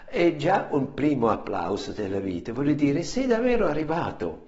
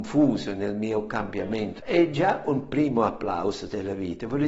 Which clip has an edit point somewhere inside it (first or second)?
second